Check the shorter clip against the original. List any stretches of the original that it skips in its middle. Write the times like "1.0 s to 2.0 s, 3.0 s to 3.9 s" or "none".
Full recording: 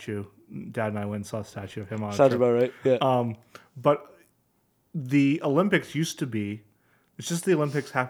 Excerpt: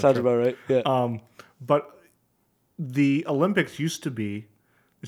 none